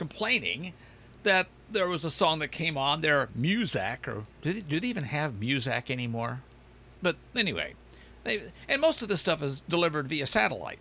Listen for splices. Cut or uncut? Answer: uncut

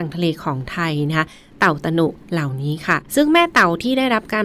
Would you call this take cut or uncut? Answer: cut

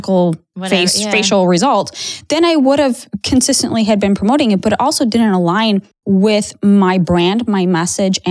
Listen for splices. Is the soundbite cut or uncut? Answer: uncut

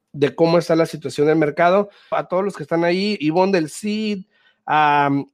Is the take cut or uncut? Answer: cut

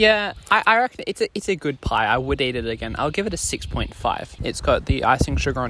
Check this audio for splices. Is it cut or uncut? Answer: cut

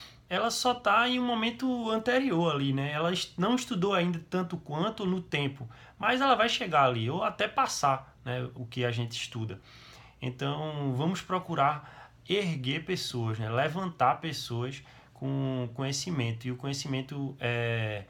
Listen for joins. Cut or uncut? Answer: cut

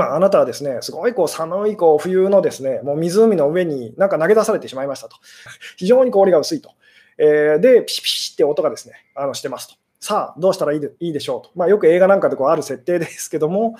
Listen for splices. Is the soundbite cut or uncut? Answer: cut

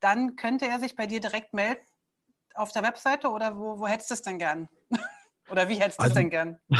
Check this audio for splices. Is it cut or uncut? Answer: uncut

